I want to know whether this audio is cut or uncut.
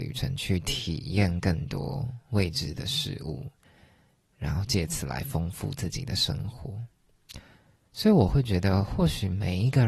uncut